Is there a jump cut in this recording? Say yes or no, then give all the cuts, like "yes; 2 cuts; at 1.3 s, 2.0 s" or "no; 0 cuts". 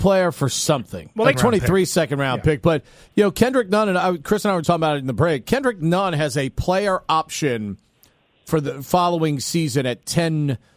yes; 2 cuts; at 1.3 s, 4.6 s